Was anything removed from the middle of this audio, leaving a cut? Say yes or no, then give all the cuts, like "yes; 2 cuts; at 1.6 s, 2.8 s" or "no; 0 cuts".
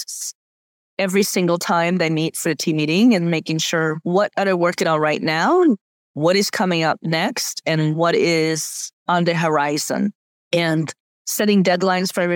no; 0 cuts